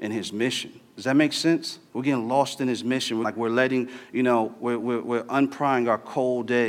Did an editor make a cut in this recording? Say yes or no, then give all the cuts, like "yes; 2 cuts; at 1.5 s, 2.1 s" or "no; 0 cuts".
yes; 2 cuts; at 1.9 s, 3.2 s